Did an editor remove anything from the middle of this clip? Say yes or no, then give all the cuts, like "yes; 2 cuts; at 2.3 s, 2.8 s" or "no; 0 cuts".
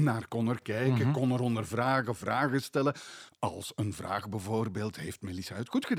no; 0 cuts